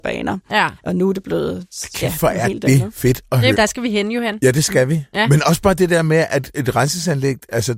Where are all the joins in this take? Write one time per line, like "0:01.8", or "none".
0:03.5